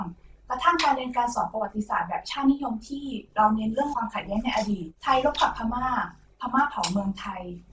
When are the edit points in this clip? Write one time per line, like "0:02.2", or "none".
0:05.0